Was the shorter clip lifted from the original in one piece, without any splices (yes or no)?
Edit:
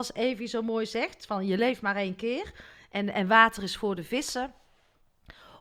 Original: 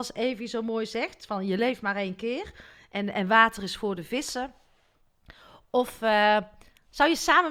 yes